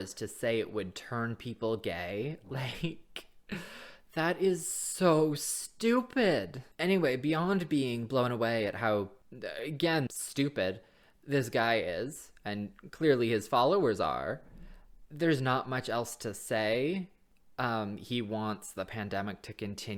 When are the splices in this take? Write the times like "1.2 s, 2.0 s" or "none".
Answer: 6.7 s, 10.1 s